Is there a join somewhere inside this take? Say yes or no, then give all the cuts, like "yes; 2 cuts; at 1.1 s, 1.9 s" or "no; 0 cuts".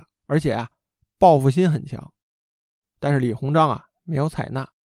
yes; 1 cut; at 2.8 s